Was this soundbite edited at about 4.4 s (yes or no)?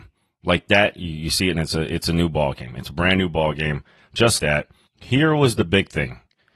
yes